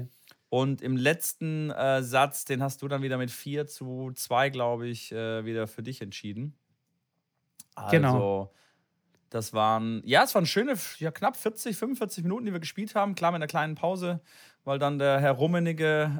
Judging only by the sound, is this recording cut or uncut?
uncut